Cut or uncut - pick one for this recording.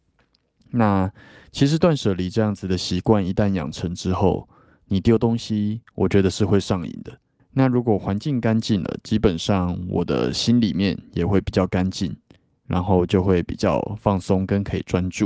cut